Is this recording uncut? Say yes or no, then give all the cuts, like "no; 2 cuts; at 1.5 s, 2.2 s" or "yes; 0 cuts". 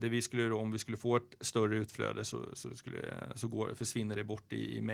yes; 0 cuts